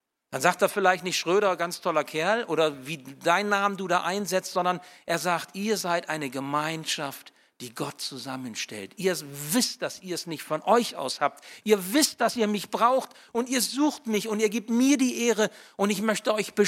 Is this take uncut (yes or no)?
yes